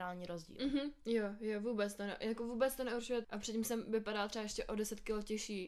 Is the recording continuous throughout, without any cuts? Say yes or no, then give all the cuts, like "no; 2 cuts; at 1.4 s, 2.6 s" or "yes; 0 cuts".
no; 1 cut; at 3.2 s